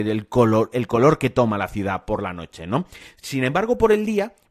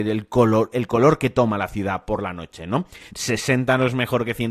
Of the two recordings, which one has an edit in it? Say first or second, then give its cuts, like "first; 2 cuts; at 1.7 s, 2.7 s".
second; 1 cut; at 3.1 s